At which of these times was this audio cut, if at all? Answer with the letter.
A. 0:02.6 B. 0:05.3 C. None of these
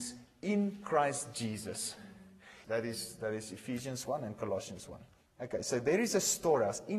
A